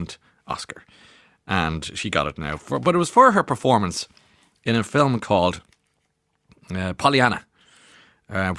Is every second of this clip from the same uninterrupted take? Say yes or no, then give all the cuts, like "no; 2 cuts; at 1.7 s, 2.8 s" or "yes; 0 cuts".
yes; 0 cuts